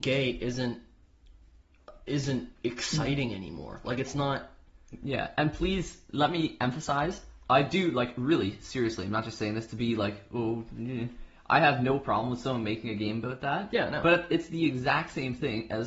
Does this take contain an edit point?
no; 0 cuts

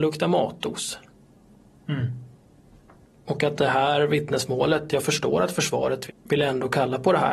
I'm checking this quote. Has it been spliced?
yes; 1 cut; at 6.1 s

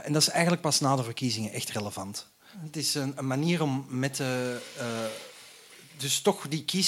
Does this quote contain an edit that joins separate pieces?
yes; 1 cut; at 2.5 s

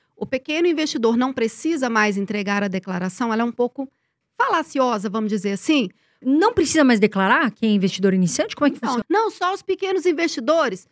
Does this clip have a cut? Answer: yes; 2 cuts; at 6.2 s, 9.0 s

